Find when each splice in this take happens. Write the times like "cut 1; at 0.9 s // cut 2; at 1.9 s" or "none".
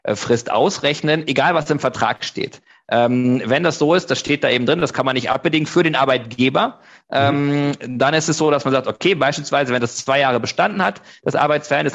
none